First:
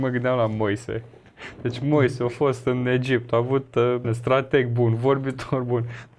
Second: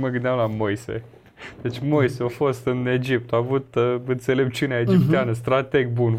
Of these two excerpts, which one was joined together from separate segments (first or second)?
first